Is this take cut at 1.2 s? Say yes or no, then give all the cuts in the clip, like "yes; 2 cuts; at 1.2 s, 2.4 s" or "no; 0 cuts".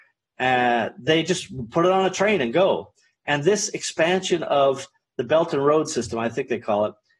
no; 0 cuts